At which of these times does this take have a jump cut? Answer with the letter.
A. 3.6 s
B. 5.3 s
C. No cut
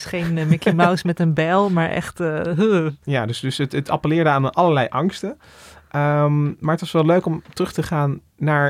C